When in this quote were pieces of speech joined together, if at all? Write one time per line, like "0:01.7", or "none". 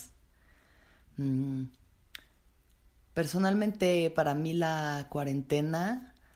0:01.0